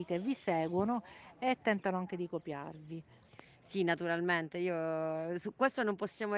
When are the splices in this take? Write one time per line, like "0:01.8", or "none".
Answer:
none